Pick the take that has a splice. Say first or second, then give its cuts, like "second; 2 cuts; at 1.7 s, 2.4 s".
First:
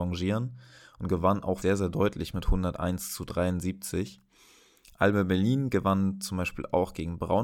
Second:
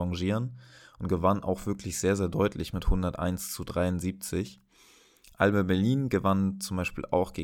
first; 1 cut; at 1.6 s